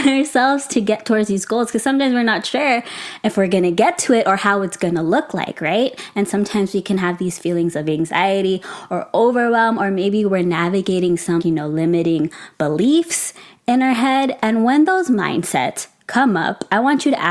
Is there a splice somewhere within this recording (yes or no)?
yes